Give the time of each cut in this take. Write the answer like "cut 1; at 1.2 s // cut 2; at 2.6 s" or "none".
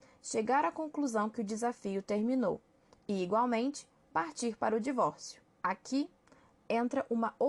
cut 1; at 5.6 s